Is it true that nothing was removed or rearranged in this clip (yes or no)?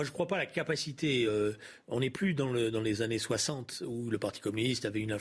yes